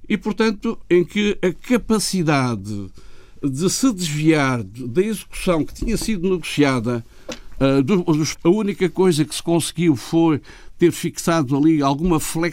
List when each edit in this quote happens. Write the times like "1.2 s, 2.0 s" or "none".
8.3 s